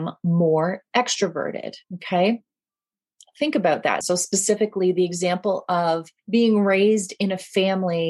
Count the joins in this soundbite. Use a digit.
3